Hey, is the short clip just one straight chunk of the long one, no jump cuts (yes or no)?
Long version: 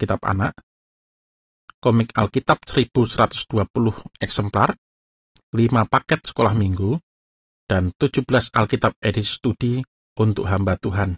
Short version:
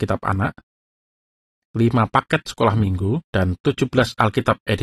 no